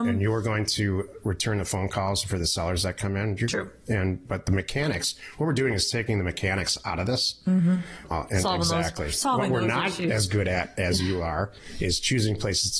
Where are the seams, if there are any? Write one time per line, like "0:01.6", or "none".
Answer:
0:08.0